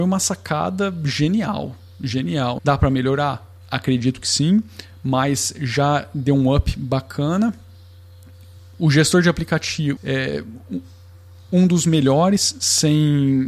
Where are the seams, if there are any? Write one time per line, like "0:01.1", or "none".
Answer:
0:02.6
0:10.0